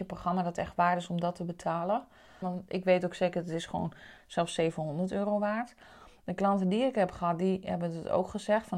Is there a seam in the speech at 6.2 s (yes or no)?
no